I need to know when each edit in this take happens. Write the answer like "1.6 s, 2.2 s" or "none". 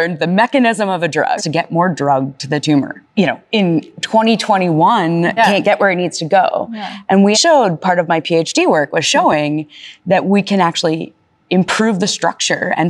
1.4 s, 5.4 s, 7.3 s